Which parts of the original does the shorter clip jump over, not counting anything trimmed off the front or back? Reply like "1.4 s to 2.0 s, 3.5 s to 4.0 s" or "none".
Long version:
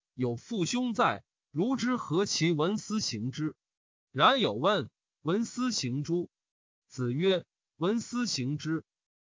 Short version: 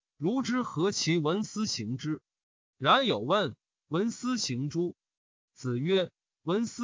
none